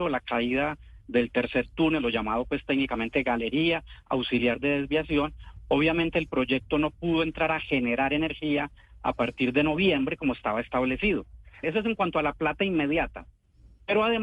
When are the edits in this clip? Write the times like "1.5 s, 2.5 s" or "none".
11.6 s